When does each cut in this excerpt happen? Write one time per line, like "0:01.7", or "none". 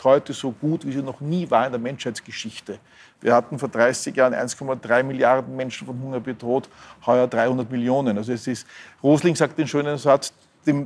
none